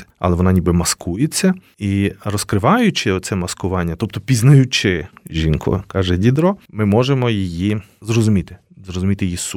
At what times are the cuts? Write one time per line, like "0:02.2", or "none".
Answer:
none